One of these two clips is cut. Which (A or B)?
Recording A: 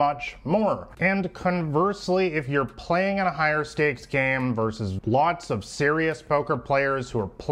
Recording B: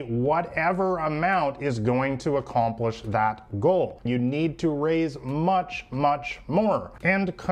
B